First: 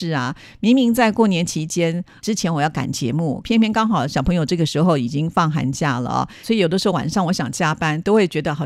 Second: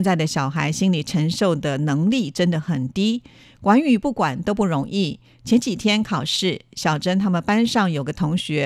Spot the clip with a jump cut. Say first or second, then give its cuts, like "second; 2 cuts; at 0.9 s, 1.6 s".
first; 2 cuts; at 3.4 s, 6.4 s